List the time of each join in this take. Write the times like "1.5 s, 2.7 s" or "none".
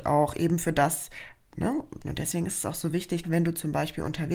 2.0 s, 3.2 s